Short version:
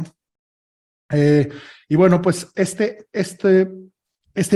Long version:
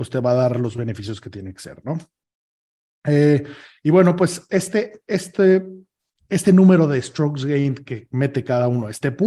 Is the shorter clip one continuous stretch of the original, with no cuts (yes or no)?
yes